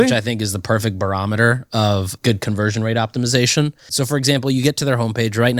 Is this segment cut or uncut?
cut